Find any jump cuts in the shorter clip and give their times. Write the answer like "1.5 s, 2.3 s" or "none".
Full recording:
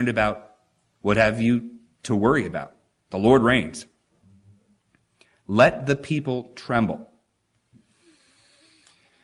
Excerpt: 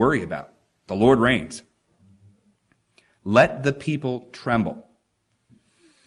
none